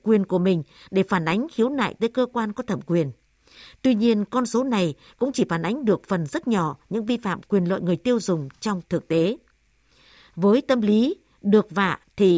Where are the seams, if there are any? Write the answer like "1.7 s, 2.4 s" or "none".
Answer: none